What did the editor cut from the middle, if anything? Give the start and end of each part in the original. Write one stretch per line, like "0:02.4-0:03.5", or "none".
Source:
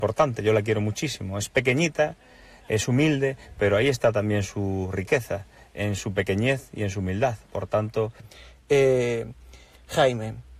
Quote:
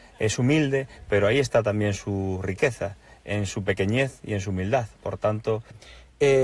none